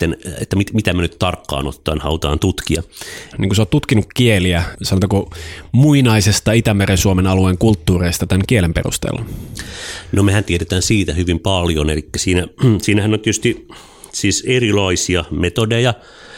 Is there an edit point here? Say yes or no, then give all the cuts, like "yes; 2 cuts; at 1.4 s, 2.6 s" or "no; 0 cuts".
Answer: yes; 2 cuts; at 3.3 s, 4.7 s